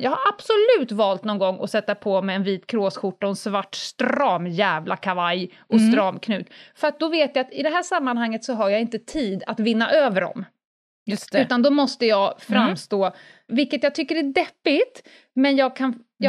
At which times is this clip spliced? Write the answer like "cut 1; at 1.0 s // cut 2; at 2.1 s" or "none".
cut 1; at 13.5 s